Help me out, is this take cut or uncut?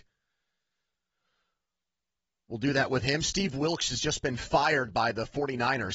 uncut